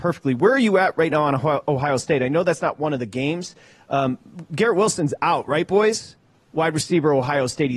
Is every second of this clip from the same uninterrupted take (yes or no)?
yes